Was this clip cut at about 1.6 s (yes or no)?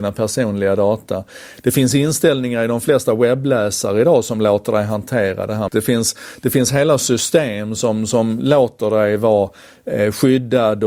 no